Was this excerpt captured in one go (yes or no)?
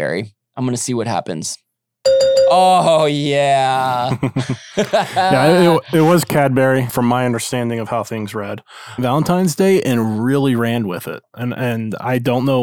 no